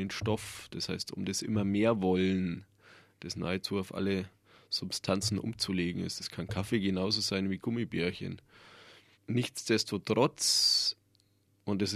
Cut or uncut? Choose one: uncut